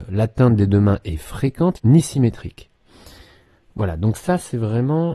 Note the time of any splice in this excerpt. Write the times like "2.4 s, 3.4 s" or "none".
1.8 s